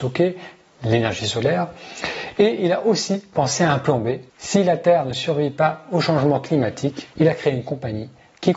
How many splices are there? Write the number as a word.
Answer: two